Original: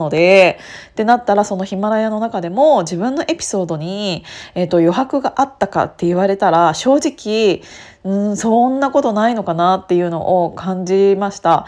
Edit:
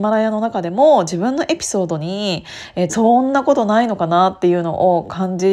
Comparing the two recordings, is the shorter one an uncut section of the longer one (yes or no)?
no